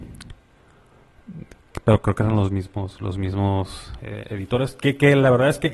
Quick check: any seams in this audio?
no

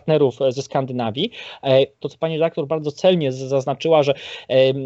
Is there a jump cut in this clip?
yes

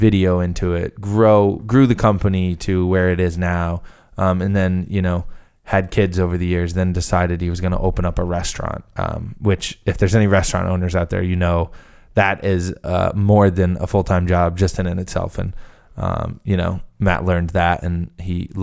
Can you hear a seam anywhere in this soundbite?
no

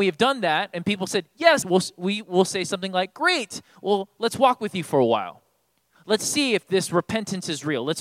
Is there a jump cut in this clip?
yes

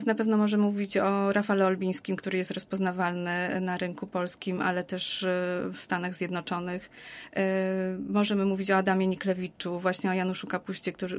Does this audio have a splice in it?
no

